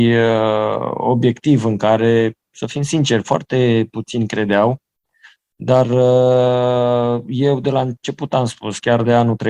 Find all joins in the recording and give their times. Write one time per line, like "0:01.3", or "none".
none